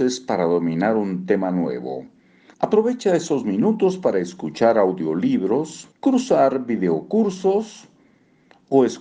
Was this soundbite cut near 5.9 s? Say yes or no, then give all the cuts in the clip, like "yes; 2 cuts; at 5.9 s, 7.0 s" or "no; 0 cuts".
yes; 2 cuts; at 2.5 s, 5.9 s